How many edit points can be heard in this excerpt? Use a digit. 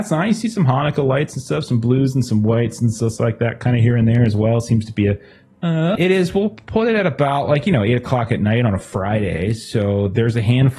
1